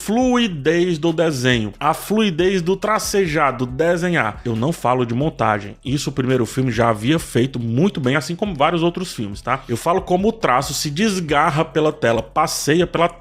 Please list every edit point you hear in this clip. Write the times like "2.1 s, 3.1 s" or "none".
none